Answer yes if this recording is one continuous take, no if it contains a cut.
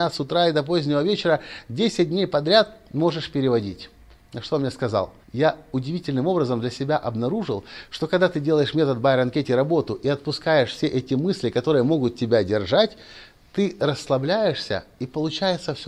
no